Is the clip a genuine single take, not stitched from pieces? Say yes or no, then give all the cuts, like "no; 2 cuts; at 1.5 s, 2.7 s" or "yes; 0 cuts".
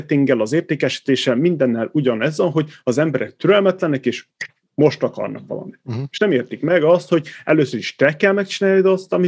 yes; 0 cuts